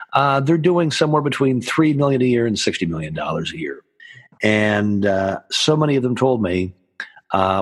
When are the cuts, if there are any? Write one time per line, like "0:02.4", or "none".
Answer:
none